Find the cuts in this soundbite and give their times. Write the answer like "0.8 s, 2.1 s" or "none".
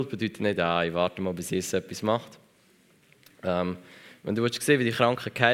none